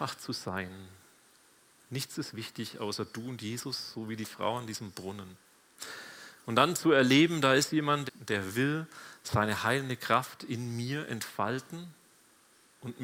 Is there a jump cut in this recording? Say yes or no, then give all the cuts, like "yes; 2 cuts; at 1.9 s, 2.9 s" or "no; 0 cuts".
yes; 1 cut; at 8.1 s